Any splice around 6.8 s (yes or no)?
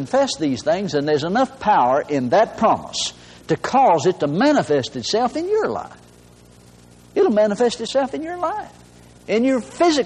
no